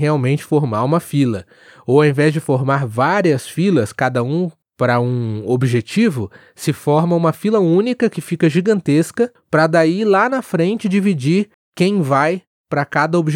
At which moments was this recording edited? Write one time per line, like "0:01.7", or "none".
none